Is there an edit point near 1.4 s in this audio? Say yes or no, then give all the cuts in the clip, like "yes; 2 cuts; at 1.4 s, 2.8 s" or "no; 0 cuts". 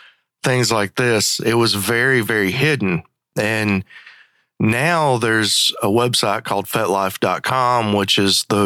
no; 0 cuts